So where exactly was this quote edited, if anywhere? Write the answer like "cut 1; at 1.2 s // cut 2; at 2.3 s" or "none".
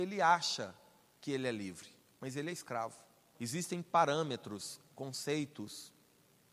cut 1; at 3.3 s